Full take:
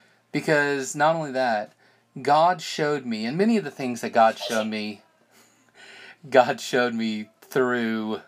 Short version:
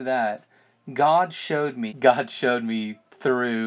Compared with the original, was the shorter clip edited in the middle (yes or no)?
yes